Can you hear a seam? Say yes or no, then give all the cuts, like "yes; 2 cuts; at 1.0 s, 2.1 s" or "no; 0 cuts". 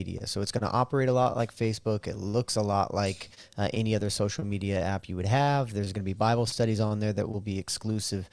no; 0 cuts